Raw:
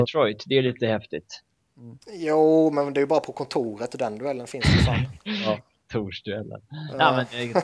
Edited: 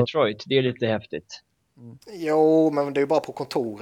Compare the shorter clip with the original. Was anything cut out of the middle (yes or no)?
no